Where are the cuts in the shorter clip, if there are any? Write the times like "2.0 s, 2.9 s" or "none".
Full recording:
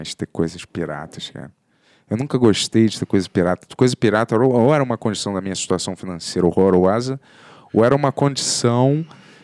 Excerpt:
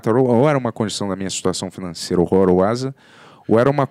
none